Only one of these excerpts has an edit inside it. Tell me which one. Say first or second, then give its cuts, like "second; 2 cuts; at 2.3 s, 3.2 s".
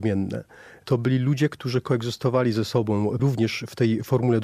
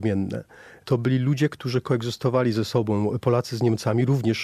first; 1 cut; at 3.2 s